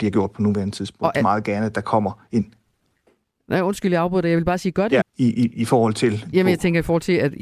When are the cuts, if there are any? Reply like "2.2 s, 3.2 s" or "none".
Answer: 1.1 s, 5.0 s, 6.3 s